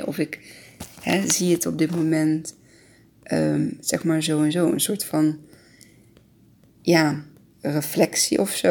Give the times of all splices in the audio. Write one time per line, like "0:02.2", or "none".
none